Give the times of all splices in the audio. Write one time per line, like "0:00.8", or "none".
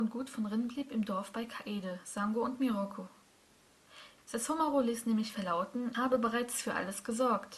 0:04.2
0:05.9

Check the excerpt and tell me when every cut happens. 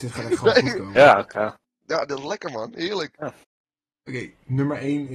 0:01.3

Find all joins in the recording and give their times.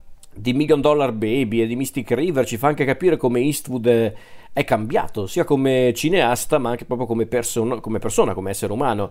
none

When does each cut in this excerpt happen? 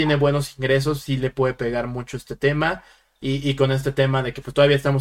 none

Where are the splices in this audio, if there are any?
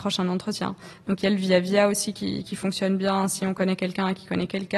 none

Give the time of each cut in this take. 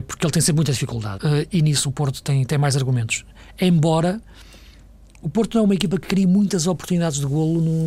0:01.2

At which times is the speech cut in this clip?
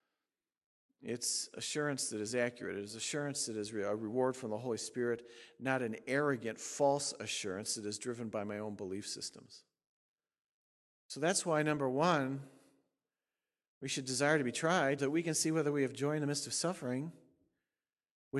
0:15.0

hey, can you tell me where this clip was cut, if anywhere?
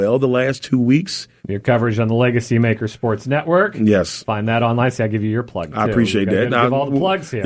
0:01.4

